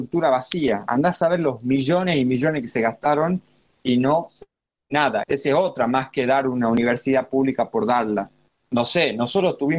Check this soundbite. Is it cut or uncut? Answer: cut